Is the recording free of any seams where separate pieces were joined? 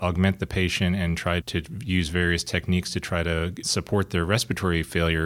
no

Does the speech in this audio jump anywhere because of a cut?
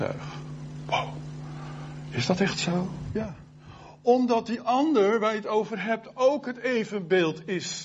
no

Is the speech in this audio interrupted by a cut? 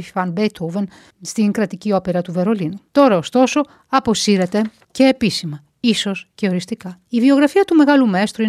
no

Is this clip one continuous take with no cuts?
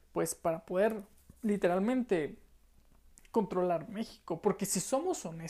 yes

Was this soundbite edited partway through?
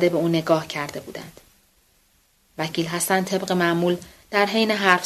no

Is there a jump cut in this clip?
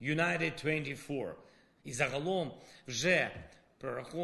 yes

